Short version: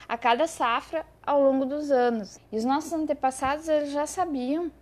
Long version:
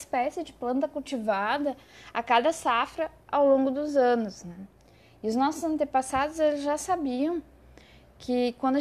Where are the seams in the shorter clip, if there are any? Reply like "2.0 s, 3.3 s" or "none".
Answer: 2.4 s